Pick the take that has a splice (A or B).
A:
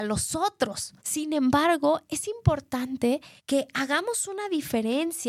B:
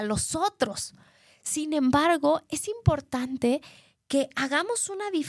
A